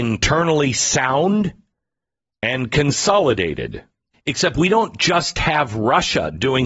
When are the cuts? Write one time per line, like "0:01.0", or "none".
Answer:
0:04.1